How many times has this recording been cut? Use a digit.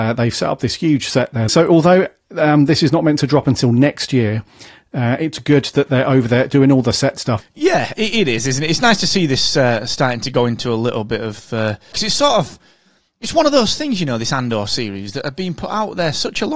3